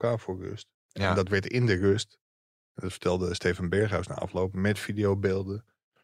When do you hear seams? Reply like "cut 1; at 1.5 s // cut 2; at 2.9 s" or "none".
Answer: none